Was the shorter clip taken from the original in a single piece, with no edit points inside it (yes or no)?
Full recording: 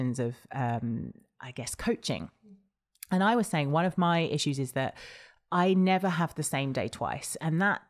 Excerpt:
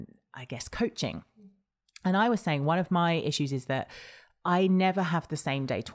yes